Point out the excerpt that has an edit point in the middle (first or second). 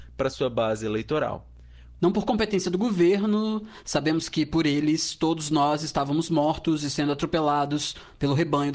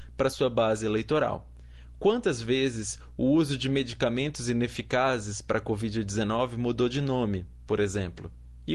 first